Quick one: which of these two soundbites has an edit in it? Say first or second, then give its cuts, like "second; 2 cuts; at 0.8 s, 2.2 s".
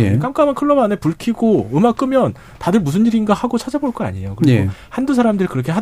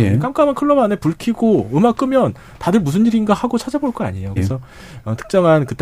second; 1 cut; at 4.4 s